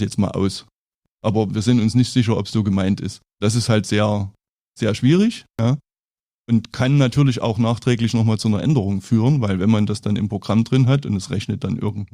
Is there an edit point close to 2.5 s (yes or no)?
yes